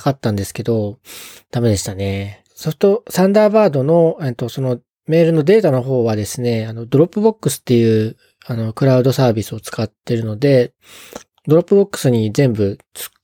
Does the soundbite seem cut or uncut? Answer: uncut